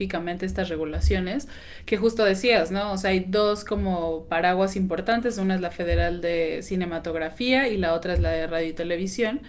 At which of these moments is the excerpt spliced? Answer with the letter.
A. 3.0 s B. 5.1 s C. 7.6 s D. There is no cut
D